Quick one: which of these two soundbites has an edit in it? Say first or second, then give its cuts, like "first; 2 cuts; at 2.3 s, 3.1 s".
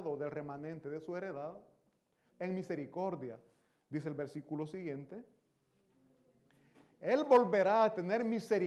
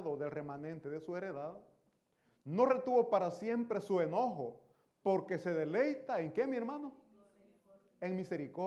first; 1 cut; at 2.3 s